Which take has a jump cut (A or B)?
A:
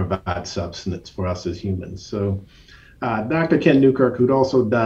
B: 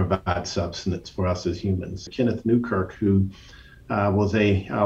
B